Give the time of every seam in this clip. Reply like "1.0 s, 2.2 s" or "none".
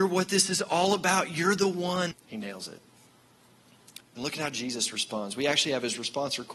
2.1 s, 4.0 s